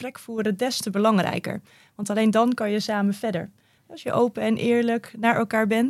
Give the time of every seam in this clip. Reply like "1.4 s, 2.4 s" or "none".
3.8 s